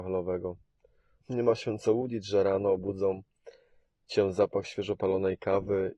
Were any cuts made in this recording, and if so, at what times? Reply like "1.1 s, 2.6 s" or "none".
1.2 s